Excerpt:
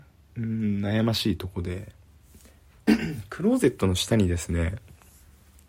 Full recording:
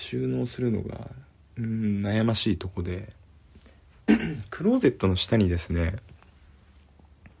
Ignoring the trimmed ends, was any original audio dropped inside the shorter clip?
no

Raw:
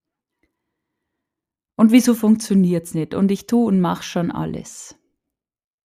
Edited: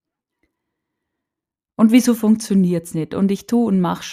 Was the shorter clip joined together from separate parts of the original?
no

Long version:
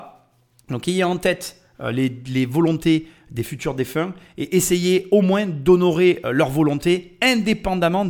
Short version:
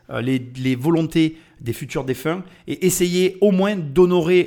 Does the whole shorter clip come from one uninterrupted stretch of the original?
yes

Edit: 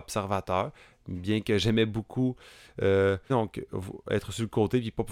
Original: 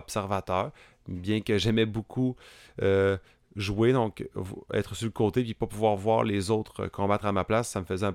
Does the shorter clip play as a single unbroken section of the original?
no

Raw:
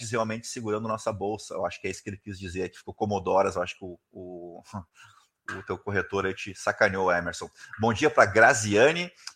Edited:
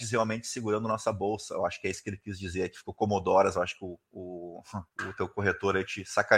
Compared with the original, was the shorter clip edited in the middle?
yes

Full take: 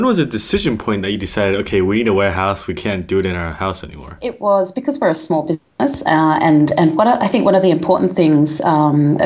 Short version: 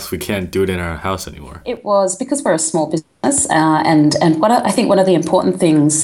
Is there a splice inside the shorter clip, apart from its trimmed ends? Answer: no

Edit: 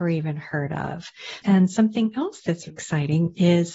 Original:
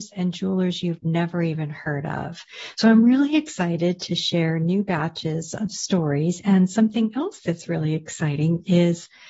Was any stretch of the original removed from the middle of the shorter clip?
yes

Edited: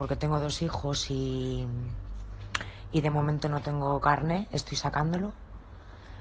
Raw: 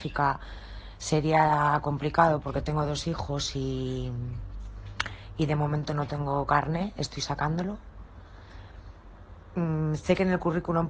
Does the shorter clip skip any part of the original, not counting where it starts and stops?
no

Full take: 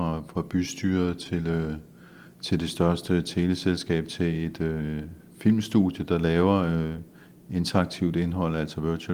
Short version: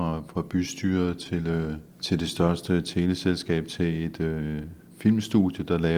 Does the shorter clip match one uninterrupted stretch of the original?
no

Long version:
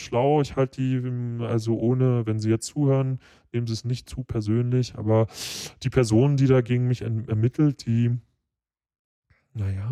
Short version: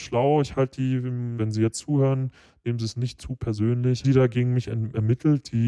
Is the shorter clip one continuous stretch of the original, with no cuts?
no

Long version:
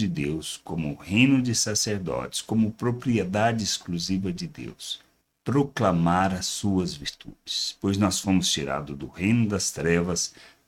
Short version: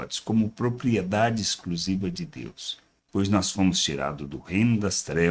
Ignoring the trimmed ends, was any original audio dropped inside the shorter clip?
yes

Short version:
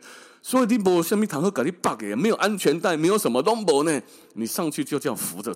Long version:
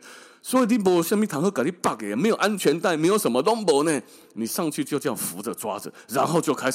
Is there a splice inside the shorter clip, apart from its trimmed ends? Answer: no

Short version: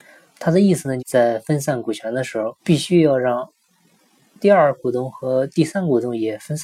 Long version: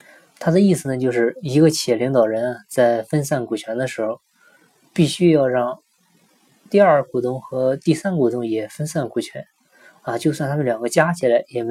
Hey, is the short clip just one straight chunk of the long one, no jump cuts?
no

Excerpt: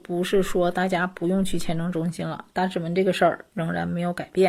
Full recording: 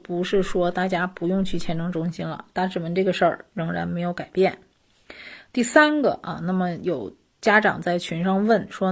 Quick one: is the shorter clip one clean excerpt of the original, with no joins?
yes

